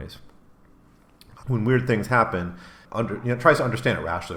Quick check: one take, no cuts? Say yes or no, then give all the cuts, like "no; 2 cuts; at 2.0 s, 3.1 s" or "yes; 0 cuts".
no; 2 cuts; at 1.4 s, 2.9 s